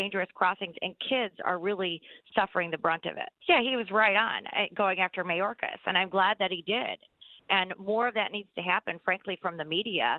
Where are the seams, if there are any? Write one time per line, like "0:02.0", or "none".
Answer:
0:03.4

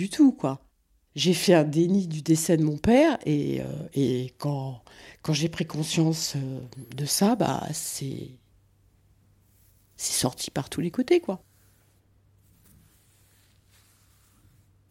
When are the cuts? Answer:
none

